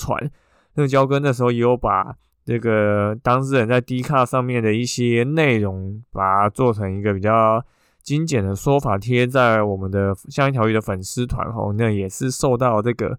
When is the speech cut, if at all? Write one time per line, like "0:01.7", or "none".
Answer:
none